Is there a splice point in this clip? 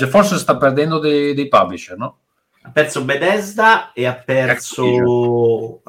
no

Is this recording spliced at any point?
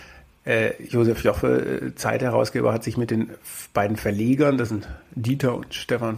no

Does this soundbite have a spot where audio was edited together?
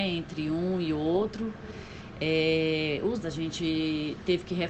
yes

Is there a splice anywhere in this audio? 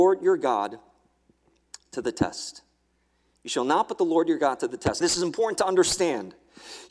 yes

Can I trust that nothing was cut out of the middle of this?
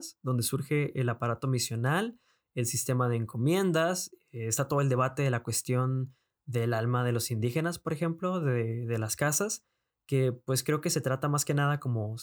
yes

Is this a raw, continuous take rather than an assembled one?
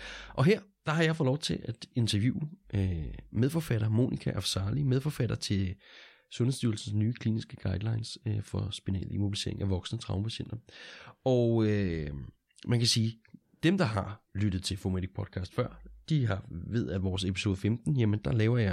yes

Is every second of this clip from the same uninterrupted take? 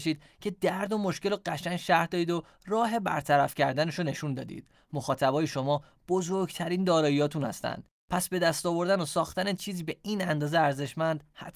yes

